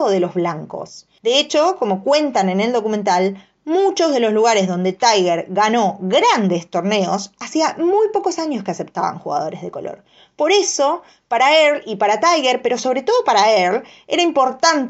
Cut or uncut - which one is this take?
uncut